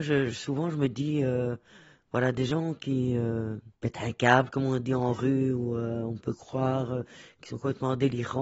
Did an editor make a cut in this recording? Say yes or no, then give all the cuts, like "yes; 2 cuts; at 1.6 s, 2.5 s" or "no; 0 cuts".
yes; 1 cut; at 3.7 s